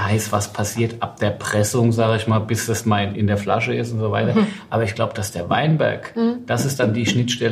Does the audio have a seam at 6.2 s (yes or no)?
no